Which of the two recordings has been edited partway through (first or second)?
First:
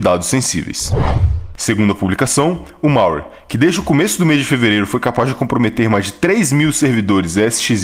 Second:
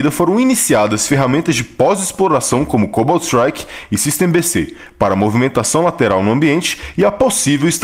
first